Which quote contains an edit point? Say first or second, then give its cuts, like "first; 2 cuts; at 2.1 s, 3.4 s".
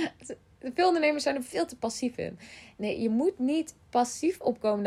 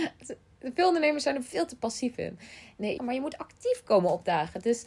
second; 1 cut; at 3.0 s